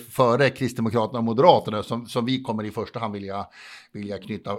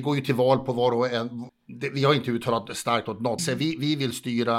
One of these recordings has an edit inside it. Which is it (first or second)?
second